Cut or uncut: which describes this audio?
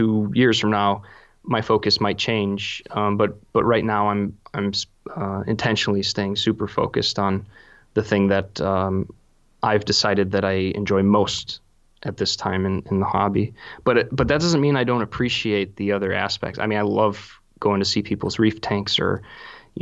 uncut